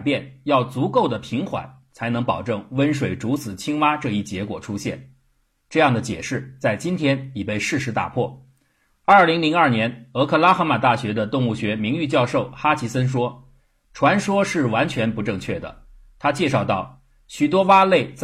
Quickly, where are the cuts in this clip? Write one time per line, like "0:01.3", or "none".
none